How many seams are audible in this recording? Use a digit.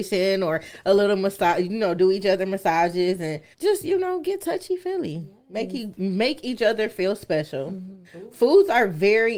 2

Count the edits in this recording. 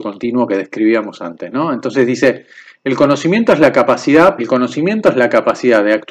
1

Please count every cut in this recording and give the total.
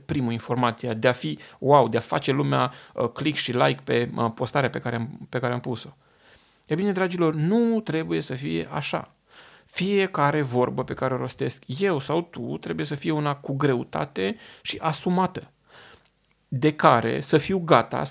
0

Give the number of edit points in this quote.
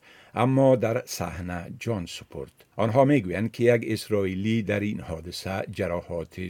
1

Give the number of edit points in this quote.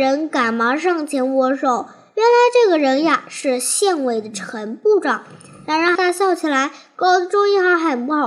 1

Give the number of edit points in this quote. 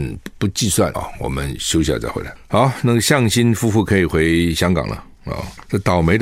1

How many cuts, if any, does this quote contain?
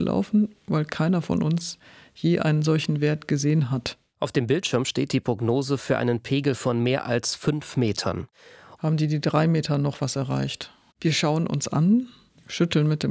2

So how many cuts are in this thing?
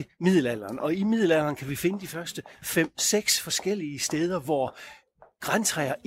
0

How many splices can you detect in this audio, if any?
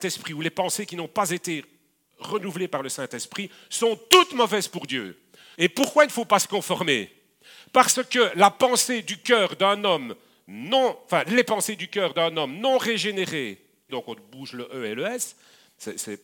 2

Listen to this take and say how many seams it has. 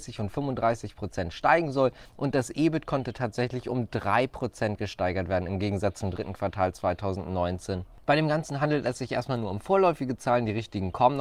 1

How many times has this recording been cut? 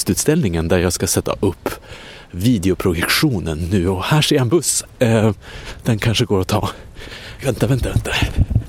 1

